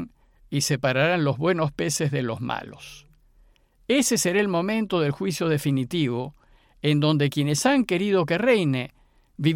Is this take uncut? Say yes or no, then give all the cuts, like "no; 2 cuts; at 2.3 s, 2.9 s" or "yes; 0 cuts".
yes; 0 cuts